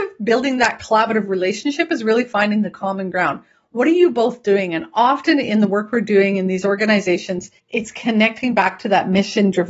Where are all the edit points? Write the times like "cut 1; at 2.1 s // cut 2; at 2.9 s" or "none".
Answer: cut 1; at 7.6 s